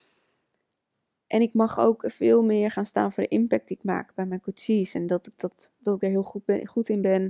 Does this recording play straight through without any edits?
yes; 0 cuts

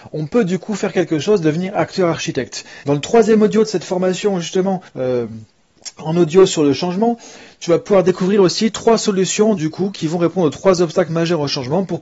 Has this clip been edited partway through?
yes; 3 cuts; at 2.8 s, 4.9 s, 9.6 s

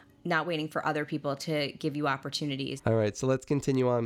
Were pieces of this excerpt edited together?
yes; 1 cut; at 2.8 s

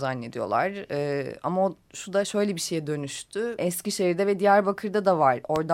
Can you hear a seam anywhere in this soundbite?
yes; 1 cut; at 3.6 s

